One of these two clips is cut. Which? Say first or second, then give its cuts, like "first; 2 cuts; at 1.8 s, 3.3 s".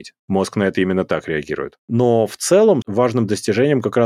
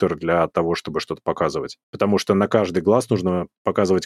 first; 1 cut; at 2.8 s